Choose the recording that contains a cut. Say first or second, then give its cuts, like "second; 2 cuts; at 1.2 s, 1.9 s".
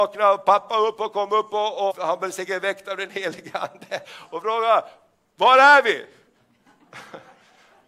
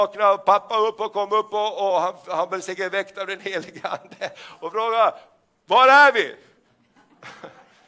first; 1 cut; at 1.9 s